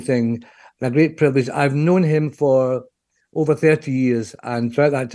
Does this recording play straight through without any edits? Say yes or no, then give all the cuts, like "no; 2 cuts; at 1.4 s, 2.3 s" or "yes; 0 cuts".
yes; 0 cuts